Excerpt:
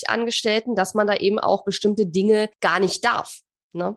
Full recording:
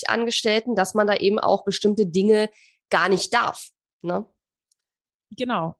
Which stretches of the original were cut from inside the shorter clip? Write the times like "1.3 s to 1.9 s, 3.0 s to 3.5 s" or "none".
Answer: 2.5 s to 2.8 s